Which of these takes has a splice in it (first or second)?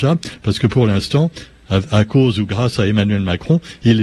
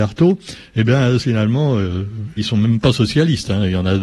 second